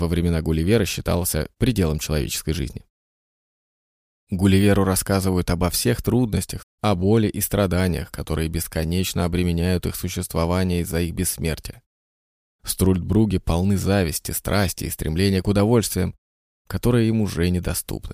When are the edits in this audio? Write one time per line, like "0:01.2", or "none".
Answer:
0:06.6
0:12.5